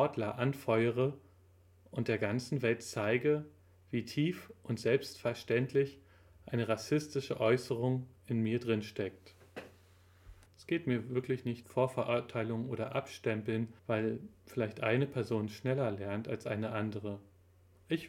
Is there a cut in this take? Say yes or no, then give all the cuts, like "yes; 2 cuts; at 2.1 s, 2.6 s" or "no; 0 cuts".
yes; 3 cuts; at 10.5 s, 11.6 s, 13.8 s